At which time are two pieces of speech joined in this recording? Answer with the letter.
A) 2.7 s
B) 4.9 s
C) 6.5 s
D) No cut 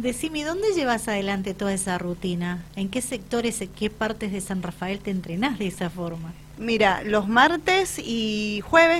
D